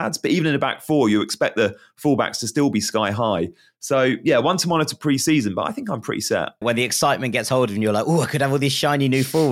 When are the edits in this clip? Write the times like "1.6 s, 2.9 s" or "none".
6.6 s